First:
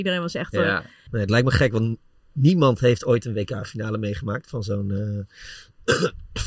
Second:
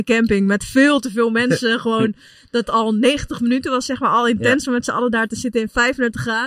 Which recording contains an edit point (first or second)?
first